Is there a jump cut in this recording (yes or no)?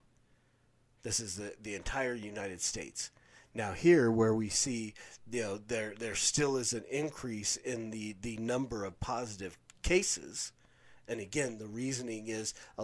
no